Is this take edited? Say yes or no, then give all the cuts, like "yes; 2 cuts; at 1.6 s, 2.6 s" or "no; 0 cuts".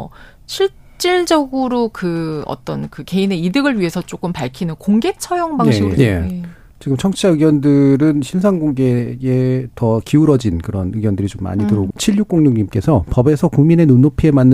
yes; 2 cuts; at 6.0 s, 11.9 s